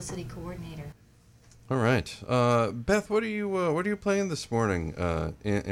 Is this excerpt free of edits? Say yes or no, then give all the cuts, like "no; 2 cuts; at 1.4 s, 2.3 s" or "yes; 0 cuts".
yes; 0 cuts